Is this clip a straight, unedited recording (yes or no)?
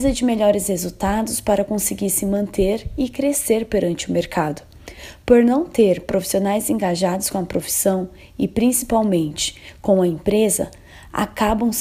yes